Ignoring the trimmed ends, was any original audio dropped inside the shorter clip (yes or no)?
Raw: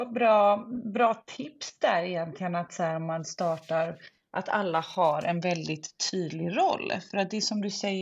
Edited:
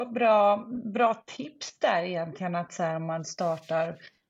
no